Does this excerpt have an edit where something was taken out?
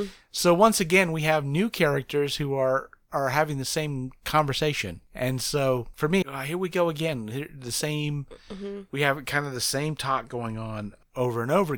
yes; 1 cut; at 6.2 s

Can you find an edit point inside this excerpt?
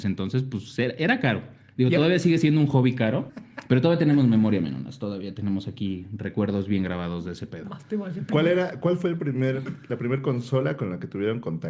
yes; 1 cut; at 3.3 s

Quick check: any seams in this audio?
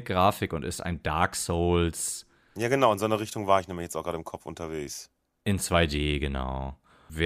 no; 0 cuts

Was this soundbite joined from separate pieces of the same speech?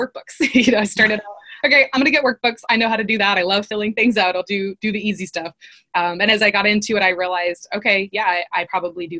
no; 0 cuts

